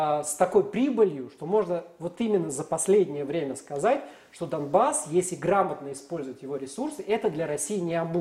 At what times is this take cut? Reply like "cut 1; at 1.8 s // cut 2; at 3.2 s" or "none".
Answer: none